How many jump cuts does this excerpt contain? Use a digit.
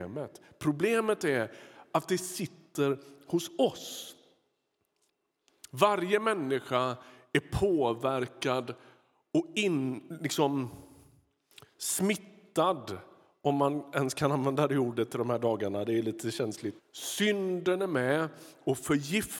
1